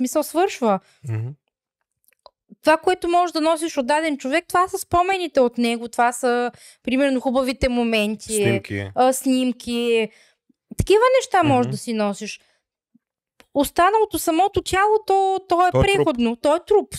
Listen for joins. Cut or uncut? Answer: uncut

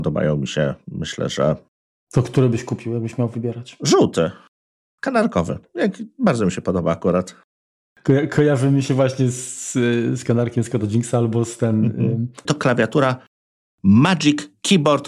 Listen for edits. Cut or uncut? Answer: cut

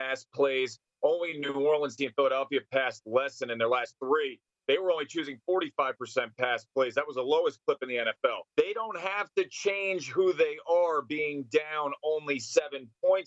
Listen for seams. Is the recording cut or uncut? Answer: cut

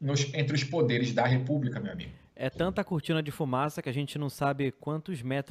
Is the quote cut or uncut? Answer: uncut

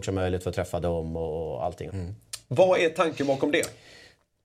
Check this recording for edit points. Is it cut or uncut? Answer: cut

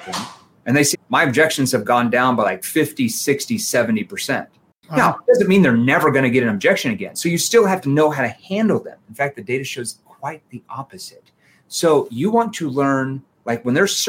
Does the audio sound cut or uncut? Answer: cut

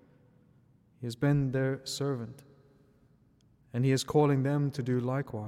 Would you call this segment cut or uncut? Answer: uncut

